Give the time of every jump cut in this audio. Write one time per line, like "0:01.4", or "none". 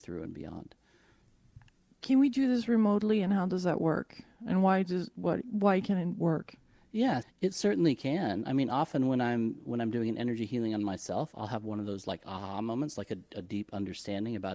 0:07.2